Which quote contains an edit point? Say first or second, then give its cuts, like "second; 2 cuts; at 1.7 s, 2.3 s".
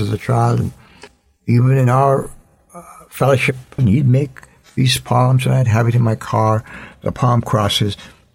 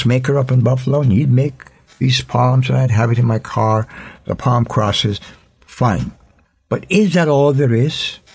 first; 1 cut; at 3.8 s